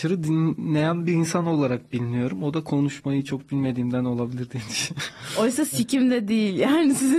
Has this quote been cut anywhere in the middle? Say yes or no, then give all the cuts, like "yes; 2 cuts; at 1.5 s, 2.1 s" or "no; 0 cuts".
no; 0 cuts